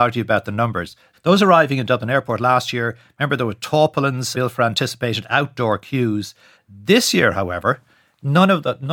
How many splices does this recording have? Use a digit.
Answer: 3